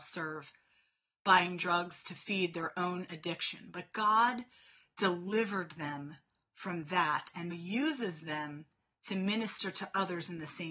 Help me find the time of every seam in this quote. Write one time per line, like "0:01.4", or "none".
0:07.5